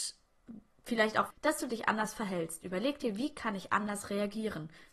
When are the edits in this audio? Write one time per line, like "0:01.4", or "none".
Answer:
0:01.3